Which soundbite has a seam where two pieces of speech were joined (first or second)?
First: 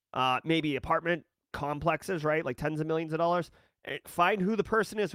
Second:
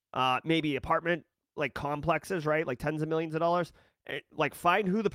first